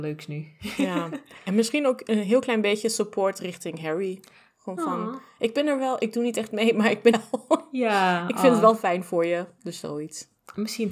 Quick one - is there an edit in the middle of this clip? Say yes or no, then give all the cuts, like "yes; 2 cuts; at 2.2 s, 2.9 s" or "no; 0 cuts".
yes; 1 cut; at 7.1 s